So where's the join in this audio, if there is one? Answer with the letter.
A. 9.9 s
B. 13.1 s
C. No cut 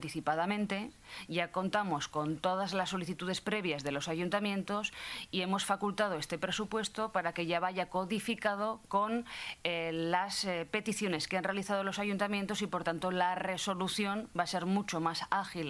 C